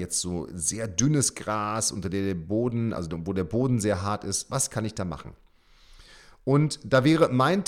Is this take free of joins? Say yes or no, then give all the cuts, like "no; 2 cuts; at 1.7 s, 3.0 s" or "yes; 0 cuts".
yes; 0 cuts